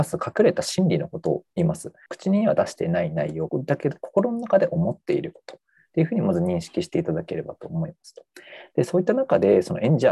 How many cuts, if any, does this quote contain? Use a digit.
2